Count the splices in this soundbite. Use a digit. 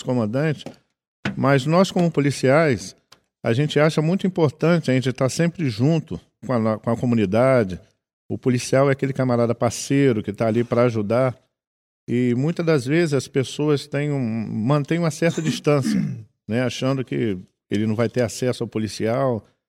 1